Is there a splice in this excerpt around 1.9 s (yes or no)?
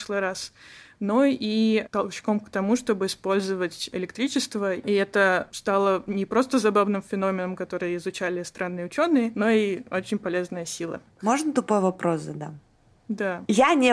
yes